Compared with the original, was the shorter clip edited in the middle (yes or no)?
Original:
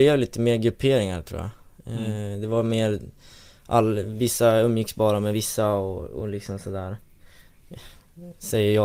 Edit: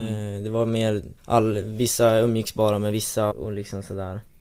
yes